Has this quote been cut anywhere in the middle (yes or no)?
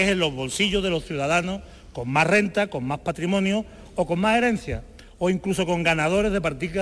no